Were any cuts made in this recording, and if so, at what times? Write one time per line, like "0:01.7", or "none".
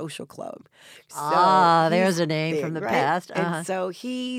none

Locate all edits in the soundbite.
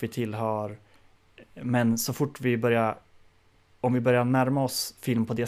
none

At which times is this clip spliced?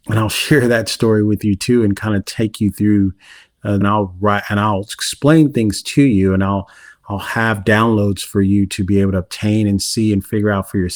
0:03.8

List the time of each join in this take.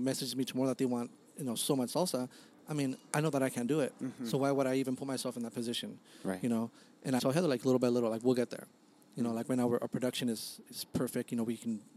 0:07.2

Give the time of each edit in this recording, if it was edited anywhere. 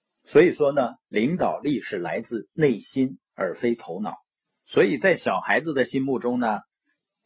0:04.5

